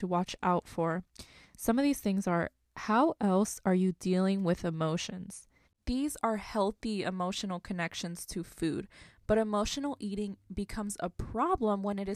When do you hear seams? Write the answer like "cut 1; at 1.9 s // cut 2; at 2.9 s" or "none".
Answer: cut 1; at 5.6 s